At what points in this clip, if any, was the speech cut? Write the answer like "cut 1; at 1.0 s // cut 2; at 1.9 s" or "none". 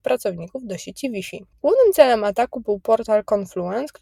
none

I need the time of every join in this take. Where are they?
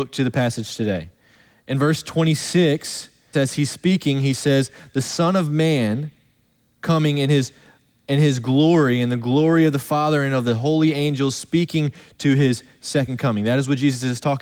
cut 1; at 3.3 s

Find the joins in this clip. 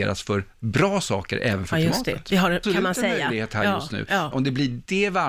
cut 1; at 2.6 s // cut 2; at 4.3 s

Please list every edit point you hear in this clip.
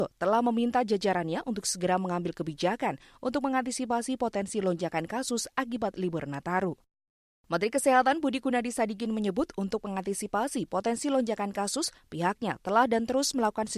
none

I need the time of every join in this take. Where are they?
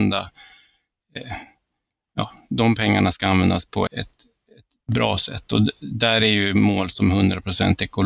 cut 1; at 3.9 s

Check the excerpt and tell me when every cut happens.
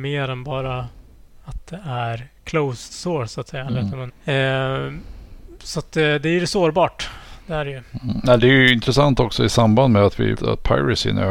cut 1; at 4.1 s // cut 2; at 10.3 s

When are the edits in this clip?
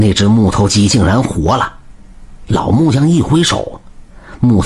none

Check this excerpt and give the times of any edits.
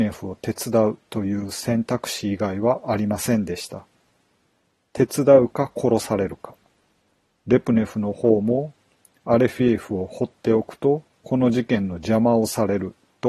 none

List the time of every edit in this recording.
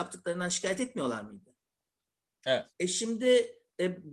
cut 1; at 2.7 s

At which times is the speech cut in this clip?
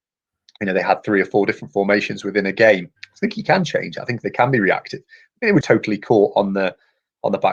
cut 1; at 3.0 s // cut 2; at 5.6 s

